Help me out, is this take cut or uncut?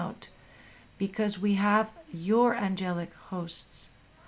uncut